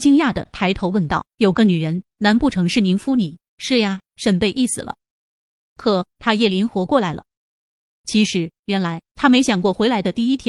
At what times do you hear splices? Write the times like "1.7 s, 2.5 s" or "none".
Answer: 3.5 s